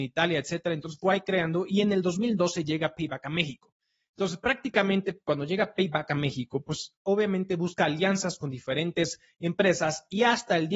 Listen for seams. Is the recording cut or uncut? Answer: uncut